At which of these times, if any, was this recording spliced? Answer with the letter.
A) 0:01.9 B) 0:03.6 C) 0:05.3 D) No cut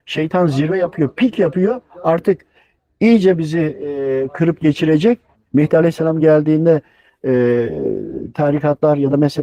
C